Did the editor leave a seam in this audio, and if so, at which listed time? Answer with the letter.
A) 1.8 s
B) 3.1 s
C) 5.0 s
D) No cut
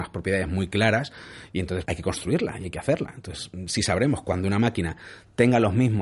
A